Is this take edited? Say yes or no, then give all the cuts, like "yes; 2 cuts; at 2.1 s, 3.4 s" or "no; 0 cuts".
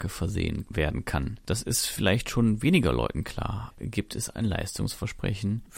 yes; 1 cut; at 3.7 s